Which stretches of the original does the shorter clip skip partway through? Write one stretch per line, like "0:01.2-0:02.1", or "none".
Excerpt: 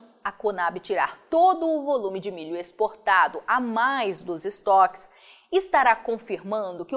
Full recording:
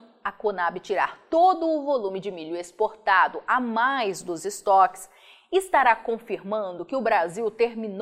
none